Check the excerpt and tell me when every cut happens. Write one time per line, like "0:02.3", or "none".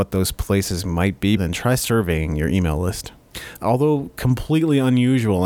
0:01.4
0:03.6